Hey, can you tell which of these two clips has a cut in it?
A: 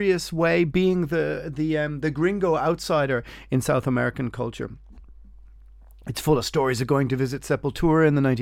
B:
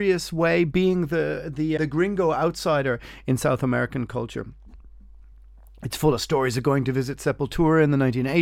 B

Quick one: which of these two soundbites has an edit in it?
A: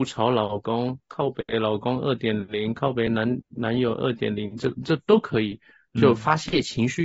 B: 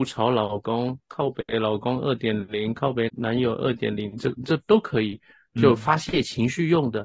B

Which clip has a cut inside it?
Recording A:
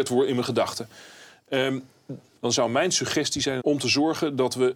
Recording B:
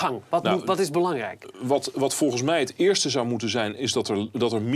A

